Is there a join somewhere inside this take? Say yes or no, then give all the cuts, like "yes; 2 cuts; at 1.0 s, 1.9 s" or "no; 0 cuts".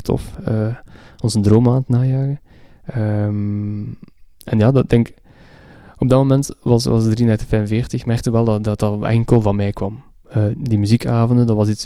yes; 1 cut; at 10.5 s